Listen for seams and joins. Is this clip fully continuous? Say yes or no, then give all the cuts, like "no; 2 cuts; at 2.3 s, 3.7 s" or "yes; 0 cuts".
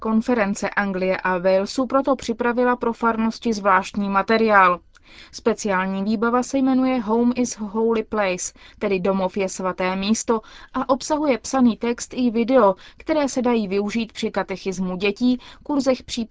yes; 0 cuts